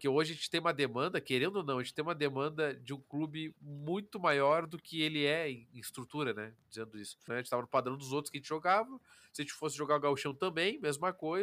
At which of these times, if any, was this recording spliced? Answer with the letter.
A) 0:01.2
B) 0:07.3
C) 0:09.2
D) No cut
B